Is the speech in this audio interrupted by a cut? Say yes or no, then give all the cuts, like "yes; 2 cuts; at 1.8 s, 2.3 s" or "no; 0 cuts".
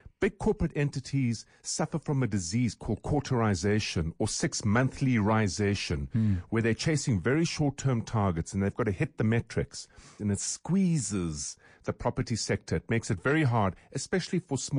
yes; 1 cut; at 10.2 s